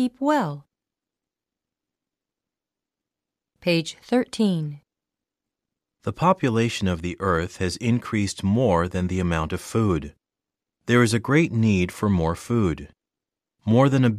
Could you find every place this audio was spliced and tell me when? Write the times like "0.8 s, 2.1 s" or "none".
none